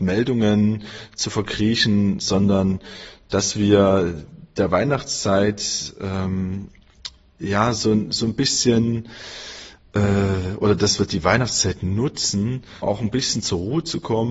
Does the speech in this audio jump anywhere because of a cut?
yes; 1 cut; at 12.8 s

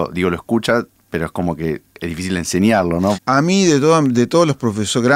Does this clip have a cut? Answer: yes; 1 cut; at 3.1 s

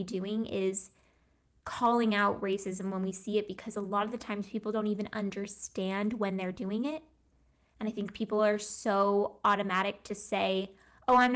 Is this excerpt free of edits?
yes; 0 cuts

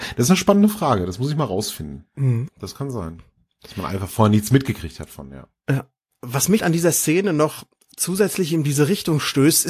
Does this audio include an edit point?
yes; 2 cuts; at 2.5 s, 6.6 s

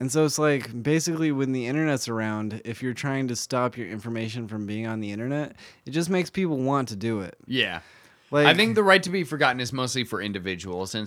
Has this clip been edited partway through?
no; 0 cuts

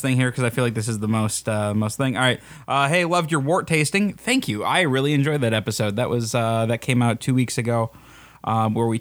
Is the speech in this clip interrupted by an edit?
no; 0 cuts

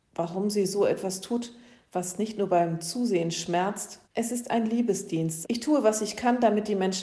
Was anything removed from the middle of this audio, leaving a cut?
yes; 2 cuts; at 4.0 s, 5.4 s

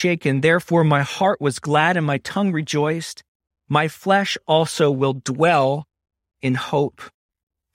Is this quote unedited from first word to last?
yes; 0 cuts

